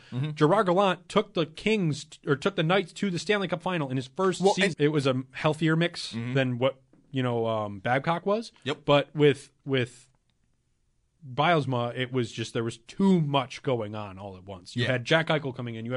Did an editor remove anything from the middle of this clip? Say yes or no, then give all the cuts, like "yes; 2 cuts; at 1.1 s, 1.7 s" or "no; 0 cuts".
yes; 1 cut; at 4.7 s